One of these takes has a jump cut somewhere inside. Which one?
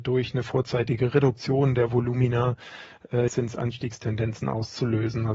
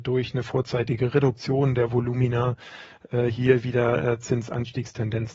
first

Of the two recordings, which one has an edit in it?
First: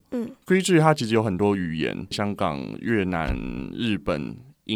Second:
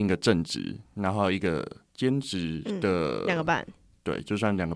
first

